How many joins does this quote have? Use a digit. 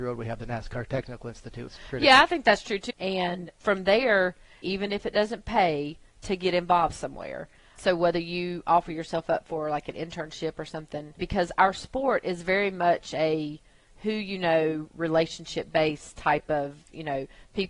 3